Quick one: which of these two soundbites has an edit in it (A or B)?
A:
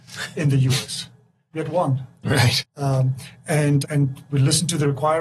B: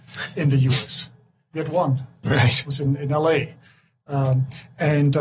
A